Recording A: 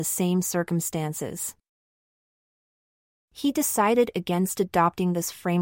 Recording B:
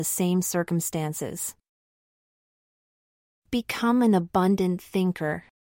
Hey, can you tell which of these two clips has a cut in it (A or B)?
A